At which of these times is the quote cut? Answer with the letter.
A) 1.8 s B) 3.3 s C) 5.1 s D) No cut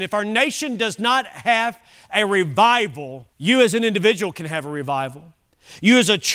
B